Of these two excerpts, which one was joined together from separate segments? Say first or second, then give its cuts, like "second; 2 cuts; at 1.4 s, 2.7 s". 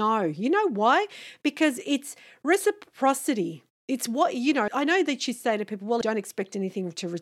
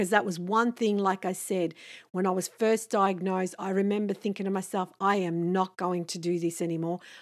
first; 2 cuts; at 4.7 s, 6.0 s